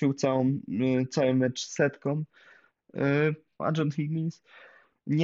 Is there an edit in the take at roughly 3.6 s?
yes; 1 cut; at 3.6 s

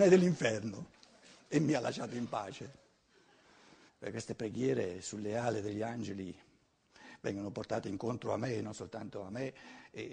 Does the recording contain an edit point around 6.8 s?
no; 1 cut; at 3.9 s

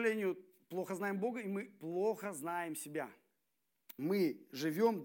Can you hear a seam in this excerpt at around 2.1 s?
no; 1 cut; at 4.0 s

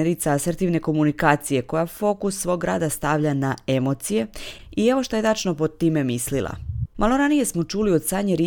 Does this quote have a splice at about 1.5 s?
no; 1 cut; at 6.8 s

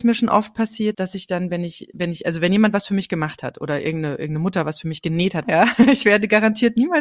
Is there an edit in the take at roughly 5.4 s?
yes; 2 cuts; at 0.9 s, 5.4 s

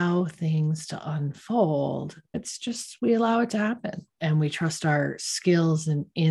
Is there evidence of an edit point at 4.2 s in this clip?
yes; 2 cuts; at 2.3 s, 4.2 s

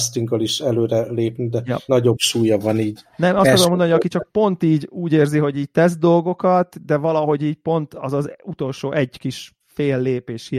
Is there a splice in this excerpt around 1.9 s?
yes; 1 cut; at 1.9 s

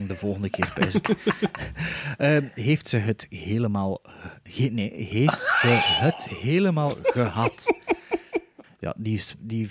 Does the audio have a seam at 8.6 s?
yes; 1 cut; at 8.6 s

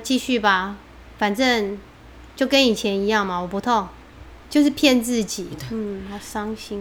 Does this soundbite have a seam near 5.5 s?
yes; 2 cuts; at 4.4 s, 5.5 s

